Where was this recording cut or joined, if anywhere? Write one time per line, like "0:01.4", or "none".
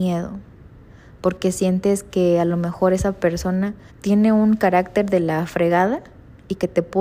0:03.9